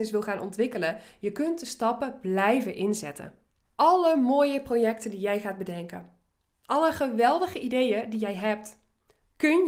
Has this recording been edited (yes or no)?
no